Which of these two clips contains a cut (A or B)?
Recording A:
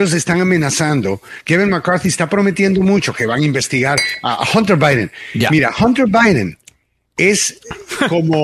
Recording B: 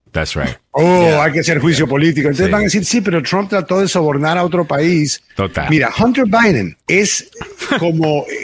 B